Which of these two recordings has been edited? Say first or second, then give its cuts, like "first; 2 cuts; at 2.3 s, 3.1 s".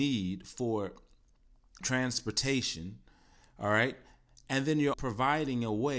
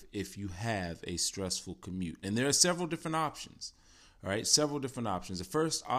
first; 2 cuts; at 1.8 s, 4.9 s